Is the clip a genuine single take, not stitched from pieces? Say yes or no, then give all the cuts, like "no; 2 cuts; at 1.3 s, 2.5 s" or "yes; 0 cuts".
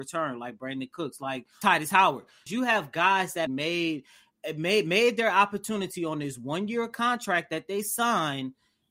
no; 2 cuts; at 2.5 s, 3.5 s